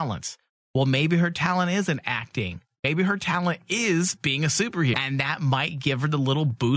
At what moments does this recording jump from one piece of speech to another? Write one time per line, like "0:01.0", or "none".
0:04.9